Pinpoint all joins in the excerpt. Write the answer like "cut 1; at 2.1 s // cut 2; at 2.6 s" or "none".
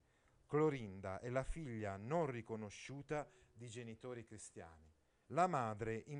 cut 1; at 5.2 s